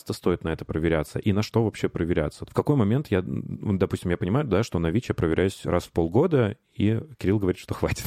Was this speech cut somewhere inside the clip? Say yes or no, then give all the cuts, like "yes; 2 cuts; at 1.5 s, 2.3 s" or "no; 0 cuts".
yes; 1 cut; at 2.5 s